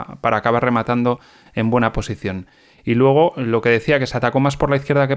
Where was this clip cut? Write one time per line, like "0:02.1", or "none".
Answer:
none